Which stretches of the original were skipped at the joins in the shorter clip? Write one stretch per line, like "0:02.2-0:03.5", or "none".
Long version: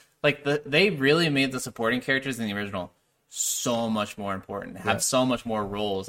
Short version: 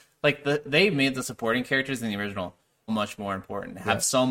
0:00.9-0:01.3
0:03.2-0:03.9